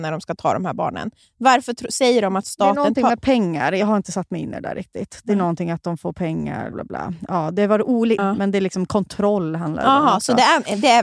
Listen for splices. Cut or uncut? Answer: cut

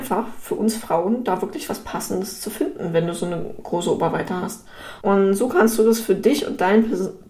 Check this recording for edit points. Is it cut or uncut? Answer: cut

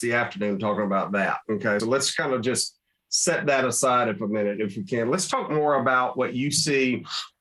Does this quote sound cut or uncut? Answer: cut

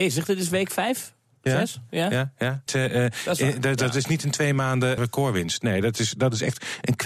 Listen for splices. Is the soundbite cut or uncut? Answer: cut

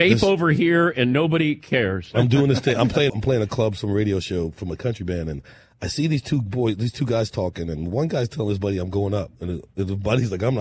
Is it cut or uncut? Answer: cut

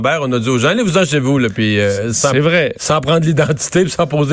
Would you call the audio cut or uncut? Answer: uncut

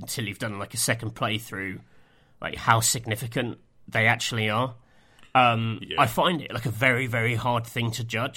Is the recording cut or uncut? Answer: uncut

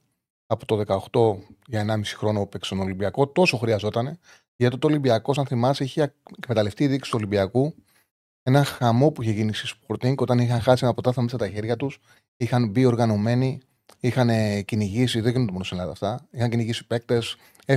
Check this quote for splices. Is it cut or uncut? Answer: uncut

